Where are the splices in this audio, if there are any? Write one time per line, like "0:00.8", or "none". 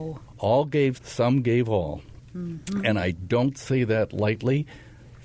0:01.0